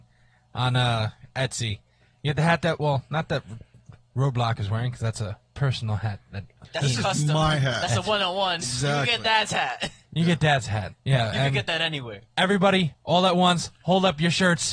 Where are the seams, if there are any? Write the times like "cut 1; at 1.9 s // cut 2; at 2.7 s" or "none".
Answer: cut 1; at 8.6 s // cut 2; at 10.9 s